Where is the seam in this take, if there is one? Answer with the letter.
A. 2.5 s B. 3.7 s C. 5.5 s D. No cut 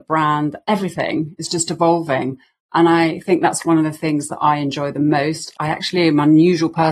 D